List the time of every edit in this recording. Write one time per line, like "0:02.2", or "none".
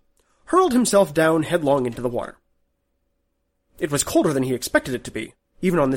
none